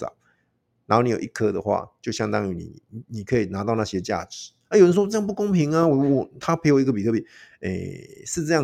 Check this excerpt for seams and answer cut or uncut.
uncut